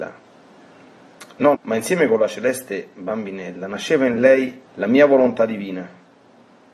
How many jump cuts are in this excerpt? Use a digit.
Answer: 2